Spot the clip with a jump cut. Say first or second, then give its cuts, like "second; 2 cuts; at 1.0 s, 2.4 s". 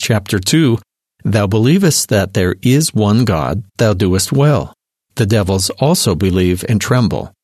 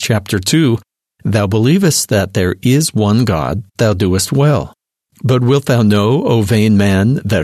second; 1 cut; at 5.1 s